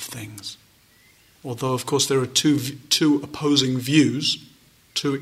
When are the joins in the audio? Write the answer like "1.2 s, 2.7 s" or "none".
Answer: 1.3 s